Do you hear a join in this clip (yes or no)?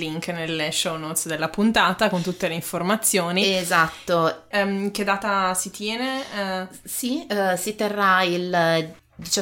yes